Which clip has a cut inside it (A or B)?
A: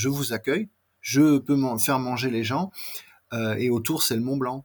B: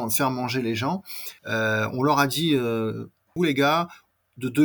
B